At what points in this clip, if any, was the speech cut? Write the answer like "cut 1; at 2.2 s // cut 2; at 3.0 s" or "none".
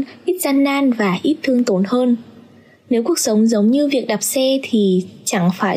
none